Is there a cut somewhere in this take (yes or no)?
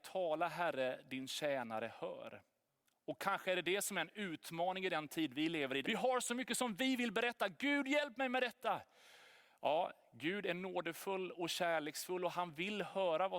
yes